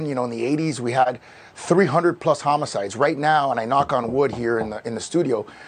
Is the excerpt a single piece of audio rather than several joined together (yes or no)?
yes